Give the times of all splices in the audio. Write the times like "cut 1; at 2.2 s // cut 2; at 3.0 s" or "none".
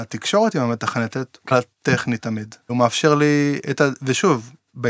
cut 1; at 1.5 s // cut 2; at 2.7 s

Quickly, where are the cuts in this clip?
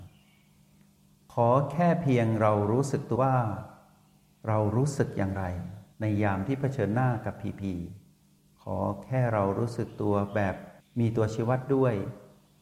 cut 1; at 3.1 s // cut 2; at 5.9 s

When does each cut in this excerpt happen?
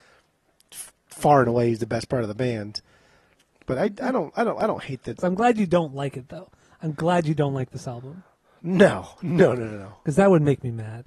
cut 1; at 5.2 s

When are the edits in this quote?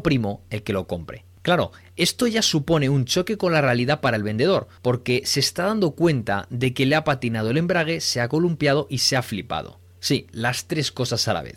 none

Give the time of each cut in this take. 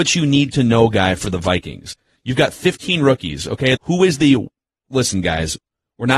cut 1; at 3.8 s

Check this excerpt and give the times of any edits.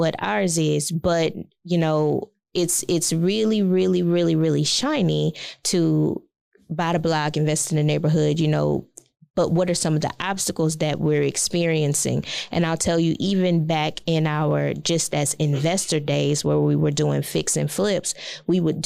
none

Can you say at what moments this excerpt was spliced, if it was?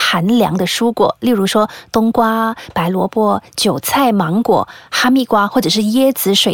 none

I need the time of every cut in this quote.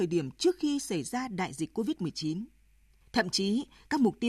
cut 1; at 3.0 s

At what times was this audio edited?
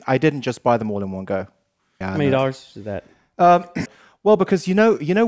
cut 1; at 2.0 s // cut 2; at 3.9 s

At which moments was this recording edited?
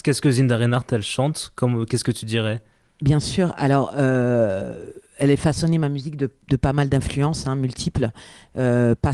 none

